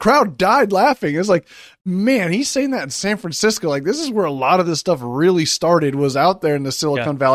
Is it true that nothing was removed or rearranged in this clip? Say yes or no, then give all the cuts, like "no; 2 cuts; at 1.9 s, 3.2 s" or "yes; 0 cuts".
yes; 0 cuts